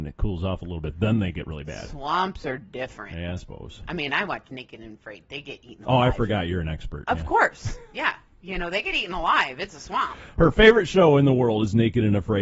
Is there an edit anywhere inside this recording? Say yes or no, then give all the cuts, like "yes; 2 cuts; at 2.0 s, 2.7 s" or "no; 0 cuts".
no; 0 cuts